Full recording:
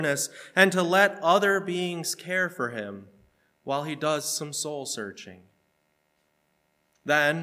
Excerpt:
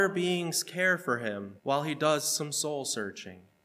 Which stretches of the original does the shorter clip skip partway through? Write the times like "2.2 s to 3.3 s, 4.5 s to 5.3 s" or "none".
3.1 s to 3.6 s

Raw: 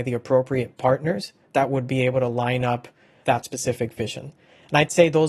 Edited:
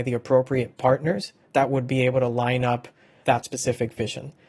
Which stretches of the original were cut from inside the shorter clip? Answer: none

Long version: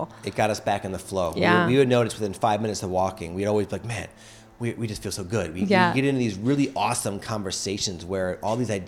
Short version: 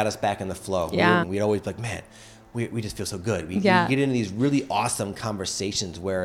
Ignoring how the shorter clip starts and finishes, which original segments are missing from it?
1.7 s to 3.3 s

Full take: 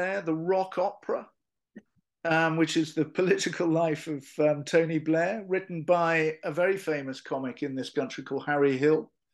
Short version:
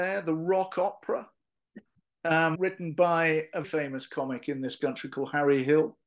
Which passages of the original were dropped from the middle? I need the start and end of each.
2.5 s to 5.4 s, 6.5 s to 6.8 s

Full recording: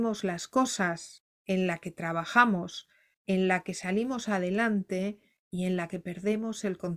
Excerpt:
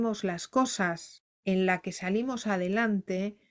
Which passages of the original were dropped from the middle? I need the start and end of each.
1.4 s to 3.2 s

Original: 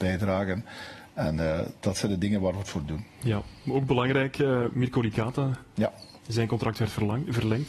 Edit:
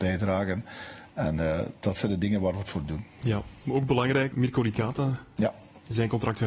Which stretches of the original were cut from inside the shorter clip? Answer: 4.3 s to 4.7 s

